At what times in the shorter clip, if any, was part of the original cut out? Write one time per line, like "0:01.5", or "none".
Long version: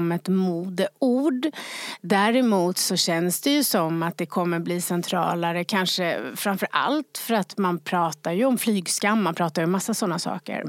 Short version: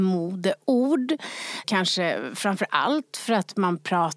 0:01.6